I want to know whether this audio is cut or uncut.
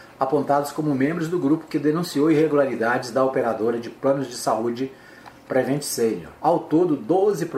cut